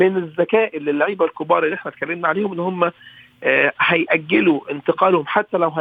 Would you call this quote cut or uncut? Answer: uncut